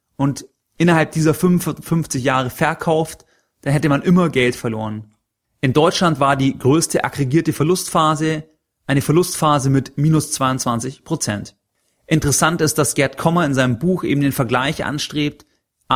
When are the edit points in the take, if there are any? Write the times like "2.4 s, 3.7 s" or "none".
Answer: none

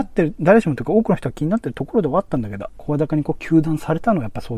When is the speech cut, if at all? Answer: 2.7 s

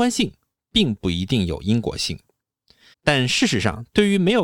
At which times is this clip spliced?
2.9 s

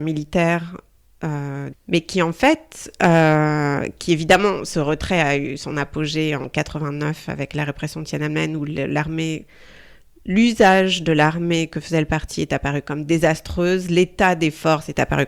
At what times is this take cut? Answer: 1.7 s

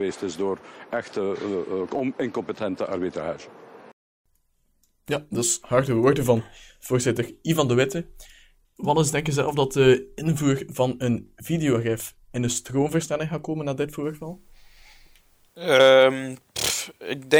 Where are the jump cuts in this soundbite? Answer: 8.6 s

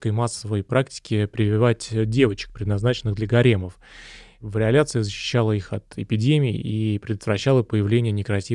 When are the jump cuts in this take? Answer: none

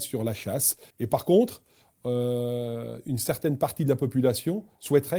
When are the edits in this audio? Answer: 0.9 s

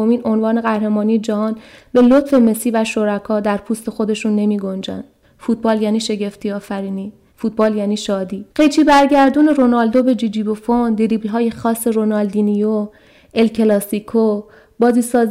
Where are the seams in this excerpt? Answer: 5.2 s, 7.3 s, 8.5 s

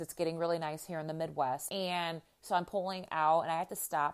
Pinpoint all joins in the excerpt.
1.7 s

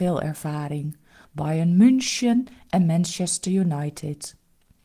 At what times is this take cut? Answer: 1.2 s

